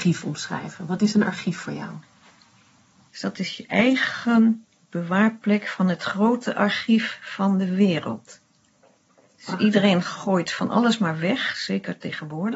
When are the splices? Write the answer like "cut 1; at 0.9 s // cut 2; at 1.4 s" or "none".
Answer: none